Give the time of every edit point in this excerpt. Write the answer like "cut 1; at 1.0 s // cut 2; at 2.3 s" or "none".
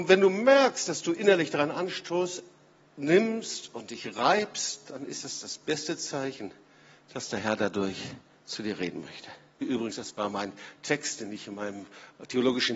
cut 1; at 9.6 s